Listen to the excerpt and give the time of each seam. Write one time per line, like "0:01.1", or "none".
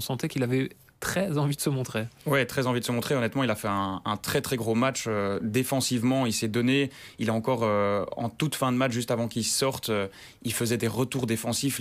none